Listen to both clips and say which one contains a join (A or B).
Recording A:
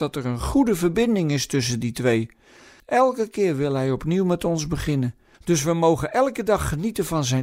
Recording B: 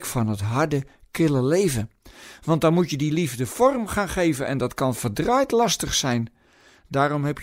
A